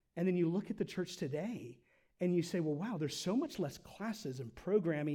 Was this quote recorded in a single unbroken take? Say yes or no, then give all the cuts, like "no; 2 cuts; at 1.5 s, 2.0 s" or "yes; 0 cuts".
yes; 0 cuts